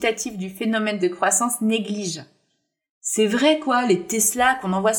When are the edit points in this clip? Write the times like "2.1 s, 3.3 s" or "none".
none